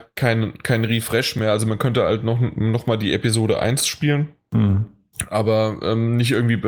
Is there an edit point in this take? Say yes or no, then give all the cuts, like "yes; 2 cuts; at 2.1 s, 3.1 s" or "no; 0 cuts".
no; 0 cuts